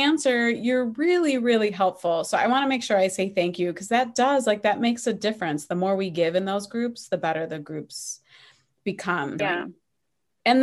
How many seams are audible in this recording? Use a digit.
1